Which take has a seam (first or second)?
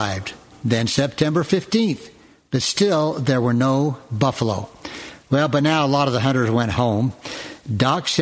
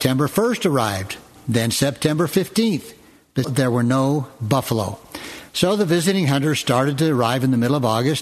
second